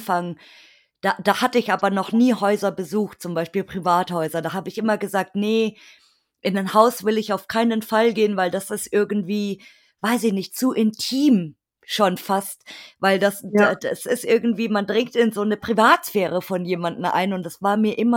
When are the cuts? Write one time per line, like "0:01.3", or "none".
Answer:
none